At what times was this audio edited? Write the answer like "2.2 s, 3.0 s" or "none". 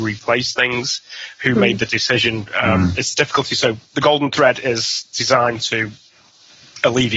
none